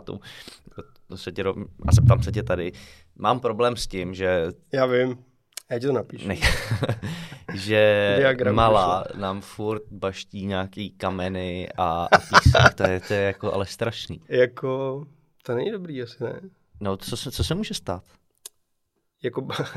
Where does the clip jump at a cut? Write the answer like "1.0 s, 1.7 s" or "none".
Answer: 14.2 s